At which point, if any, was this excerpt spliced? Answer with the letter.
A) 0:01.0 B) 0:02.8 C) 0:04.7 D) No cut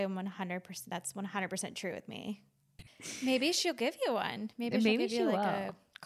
B